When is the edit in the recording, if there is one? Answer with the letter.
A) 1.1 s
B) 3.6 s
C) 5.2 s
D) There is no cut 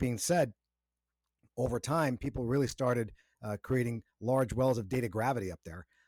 D